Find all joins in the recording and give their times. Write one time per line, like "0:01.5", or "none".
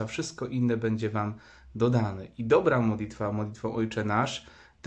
none